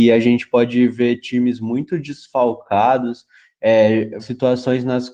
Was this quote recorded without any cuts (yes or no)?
no